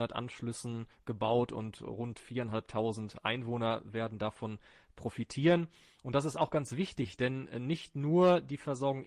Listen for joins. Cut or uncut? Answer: uncut